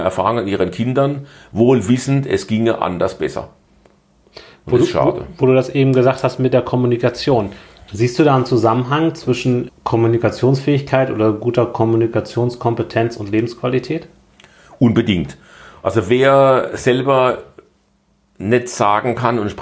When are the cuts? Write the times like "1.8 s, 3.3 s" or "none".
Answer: 9.7 s